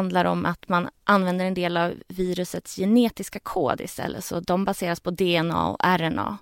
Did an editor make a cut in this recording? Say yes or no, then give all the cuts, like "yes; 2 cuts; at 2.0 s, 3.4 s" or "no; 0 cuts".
no; 0 cuts